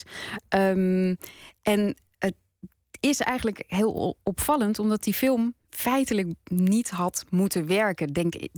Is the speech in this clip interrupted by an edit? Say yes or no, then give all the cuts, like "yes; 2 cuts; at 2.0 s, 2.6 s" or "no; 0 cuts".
yes; 1 cut; at 5.6 s